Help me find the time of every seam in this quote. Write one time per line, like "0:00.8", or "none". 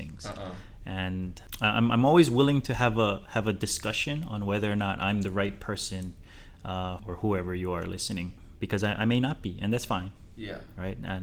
0:07.0